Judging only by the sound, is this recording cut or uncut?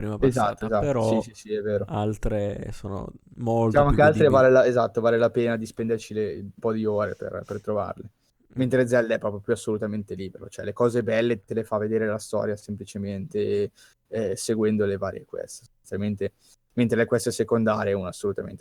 uncut